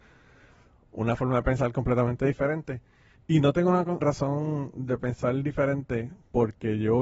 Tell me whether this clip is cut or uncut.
cut